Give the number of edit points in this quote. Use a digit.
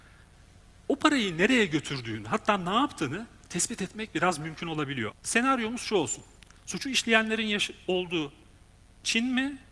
2